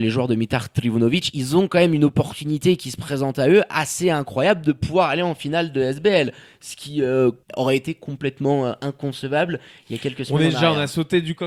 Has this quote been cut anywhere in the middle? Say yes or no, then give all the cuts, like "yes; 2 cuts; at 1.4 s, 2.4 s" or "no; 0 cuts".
yes; 1 cut; at 7.4 s